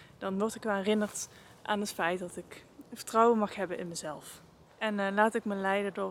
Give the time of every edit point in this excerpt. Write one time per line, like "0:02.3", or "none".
0:04.7